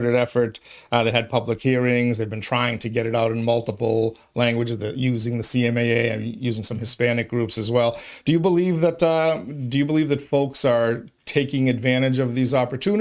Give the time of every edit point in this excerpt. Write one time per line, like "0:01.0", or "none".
none